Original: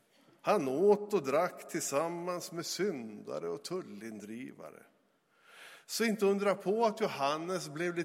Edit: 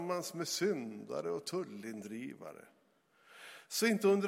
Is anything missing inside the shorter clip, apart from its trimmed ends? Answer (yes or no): no